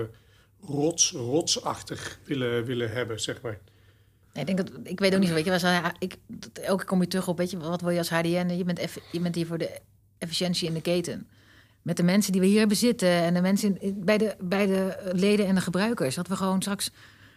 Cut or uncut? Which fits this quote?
cut